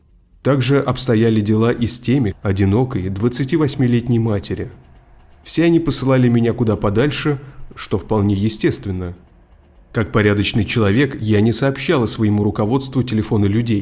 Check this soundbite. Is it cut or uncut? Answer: cut